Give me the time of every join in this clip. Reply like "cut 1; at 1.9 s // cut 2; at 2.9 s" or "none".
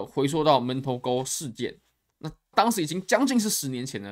cut 1; at 2.5 s